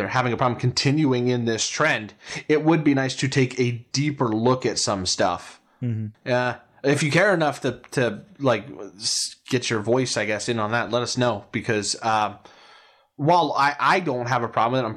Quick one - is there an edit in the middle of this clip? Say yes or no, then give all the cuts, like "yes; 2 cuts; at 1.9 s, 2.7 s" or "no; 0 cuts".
yes; 1 cut; at 6.1 s